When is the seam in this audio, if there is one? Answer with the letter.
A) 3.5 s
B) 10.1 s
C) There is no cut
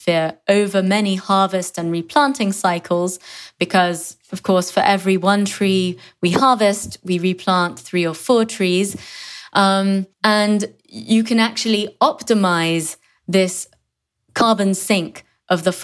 B